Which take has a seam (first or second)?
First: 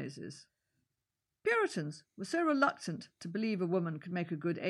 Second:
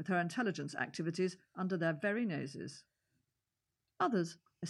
first